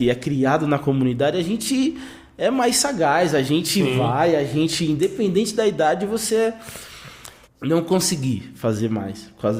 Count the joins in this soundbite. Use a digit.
1